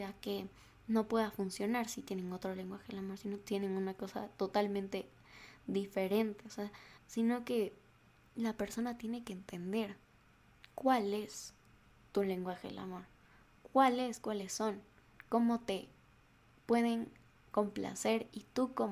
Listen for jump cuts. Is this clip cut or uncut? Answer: cut